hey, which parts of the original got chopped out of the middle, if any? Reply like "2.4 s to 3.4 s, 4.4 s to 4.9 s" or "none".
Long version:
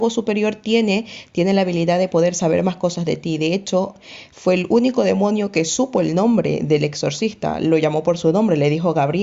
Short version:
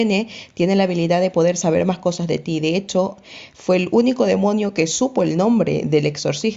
none